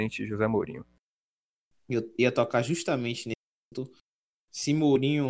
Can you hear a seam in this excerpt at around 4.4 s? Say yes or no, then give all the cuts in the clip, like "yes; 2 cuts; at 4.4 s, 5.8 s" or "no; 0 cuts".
no; 0 cuts